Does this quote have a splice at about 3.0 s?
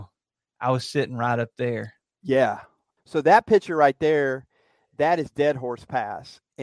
yes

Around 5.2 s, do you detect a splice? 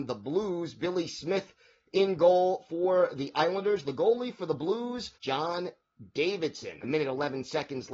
yes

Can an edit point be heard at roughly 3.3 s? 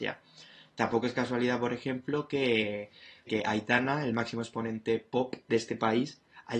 yes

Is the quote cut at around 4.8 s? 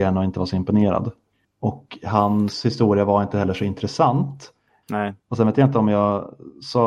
yes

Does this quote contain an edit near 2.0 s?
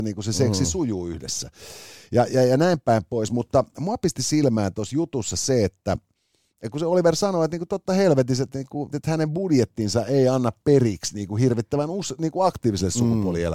no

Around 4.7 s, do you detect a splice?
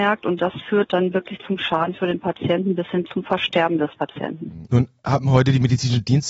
yes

